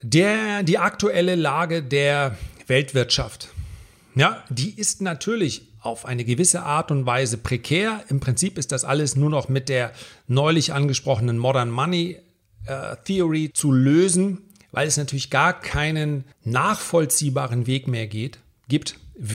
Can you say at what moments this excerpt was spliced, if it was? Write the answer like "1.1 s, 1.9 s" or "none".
13.5 s, 16.3 s